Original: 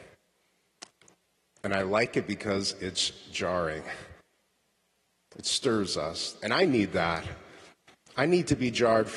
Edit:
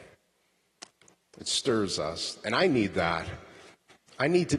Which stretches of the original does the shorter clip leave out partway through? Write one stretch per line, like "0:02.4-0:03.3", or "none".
0:01.2-0:05.2